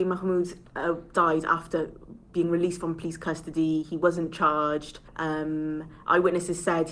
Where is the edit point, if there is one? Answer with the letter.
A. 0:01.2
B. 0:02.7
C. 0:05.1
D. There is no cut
C